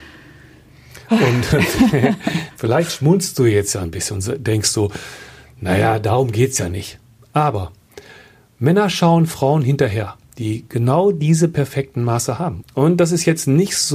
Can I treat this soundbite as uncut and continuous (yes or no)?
no